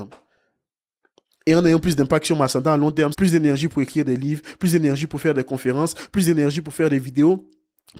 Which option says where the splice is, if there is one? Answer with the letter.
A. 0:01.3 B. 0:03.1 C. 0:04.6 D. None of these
B